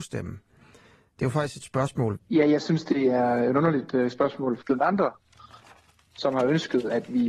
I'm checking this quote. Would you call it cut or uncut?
cut